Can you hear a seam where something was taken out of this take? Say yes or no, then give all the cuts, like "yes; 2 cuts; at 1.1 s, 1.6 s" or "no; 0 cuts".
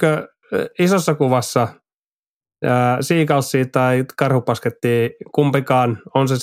no; 0 cuts